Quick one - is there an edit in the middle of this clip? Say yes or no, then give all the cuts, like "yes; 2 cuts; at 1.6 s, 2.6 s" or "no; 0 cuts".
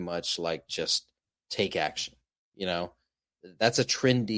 no; 0 cuts